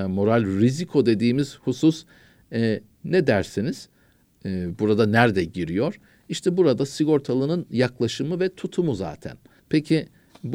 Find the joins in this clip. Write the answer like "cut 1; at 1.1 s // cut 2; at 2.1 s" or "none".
cut 1; at 9.6 s